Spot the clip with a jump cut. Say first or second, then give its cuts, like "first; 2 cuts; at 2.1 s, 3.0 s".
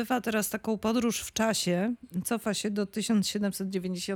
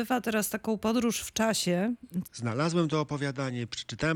second; 1 cut; at 2.2 s